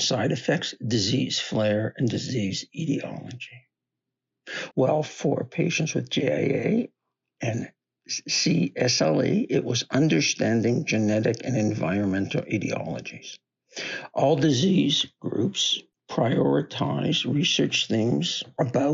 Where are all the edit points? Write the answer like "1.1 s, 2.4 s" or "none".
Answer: 4.7 s